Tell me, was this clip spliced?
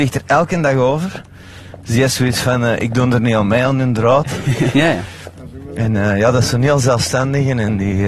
yes; 1 cut; at 4.7 s

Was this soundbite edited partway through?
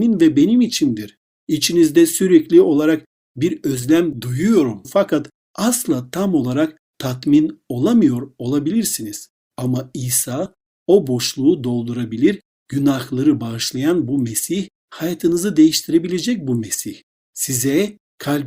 no; 0 cuts

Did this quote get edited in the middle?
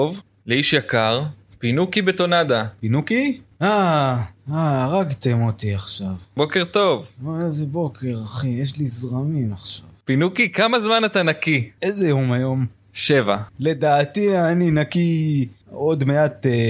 no; 0 cuts

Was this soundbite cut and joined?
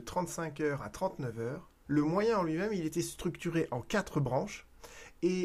yes; 1 cut; at 1.9 s

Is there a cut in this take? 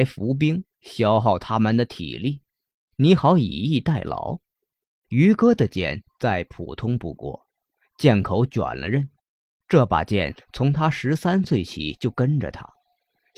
yes; 1 cut; at 4.9 s

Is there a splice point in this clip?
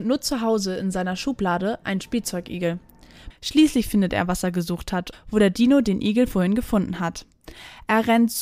yes; 2 cuts; at 3.3 s, 5.1 s

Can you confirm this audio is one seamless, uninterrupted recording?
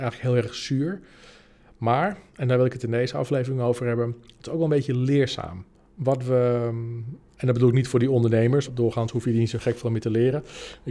no; 1 cut; at 8.7 s

